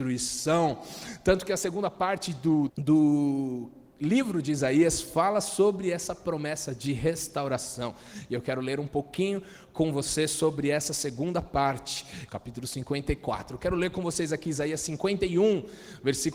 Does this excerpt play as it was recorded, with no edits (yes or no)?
no